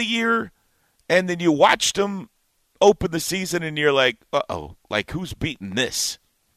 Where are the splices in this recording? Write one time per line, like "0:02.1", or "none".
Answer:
none